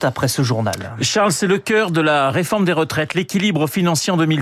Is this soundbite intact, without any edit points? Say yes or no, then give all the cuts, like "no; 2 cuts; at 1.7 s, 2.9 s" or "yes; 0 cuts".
yes; 0 cuts